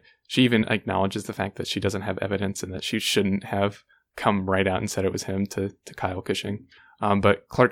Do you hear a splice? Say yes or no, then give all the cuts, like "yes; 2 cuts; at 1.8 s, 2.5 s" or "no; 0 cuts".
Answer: no; 0 cuts